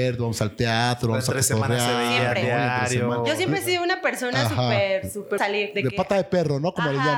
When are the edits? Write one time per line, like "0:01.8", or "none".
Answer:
0:05.4